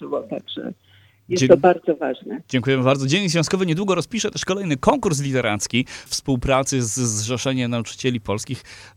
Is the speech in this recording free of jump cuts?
no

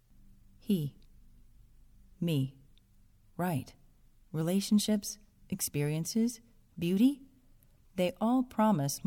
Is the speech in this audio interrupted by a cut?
yes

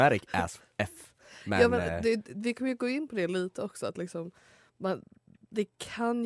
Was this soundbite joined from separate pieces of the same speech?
no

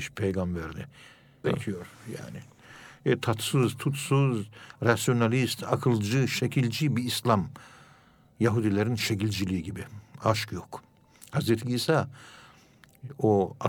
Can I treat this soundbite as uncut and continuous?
no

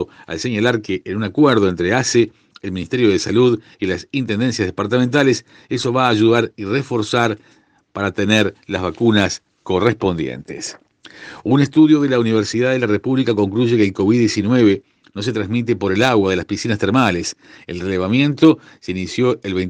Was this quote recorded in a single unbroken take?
yes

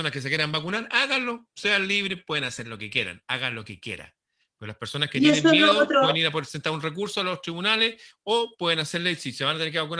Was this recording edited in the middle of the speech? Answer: no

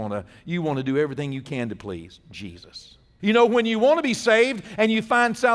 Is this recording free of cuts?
no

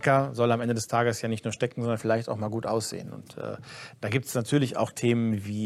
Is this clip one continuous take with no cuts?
yes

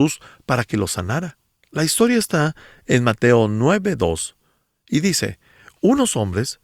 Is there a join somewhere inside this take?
no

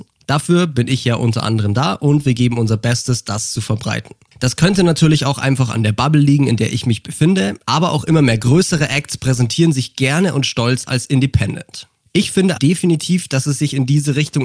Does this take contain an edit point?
yes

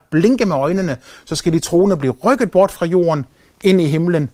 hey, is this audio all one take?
yes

